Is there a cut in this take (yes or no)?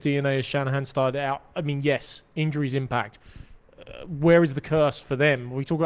no